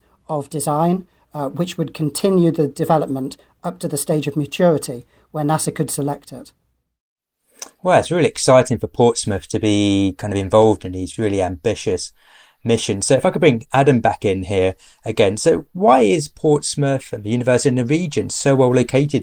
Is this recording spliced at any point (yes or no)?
no